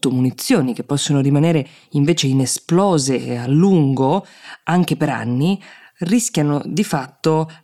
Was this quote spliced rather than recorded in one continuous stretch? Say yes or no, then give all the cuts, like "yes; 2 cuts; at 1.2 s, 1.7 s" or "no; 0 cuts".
no; 0 cuts